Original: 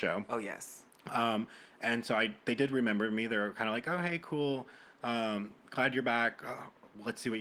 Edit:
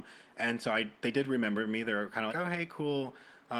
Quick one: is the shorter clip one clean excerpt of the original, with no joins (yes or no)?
no